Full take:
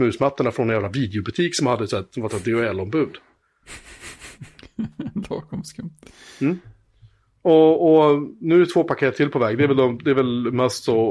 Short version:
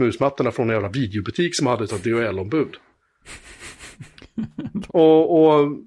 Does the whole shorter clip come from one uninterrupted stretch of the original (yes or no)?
no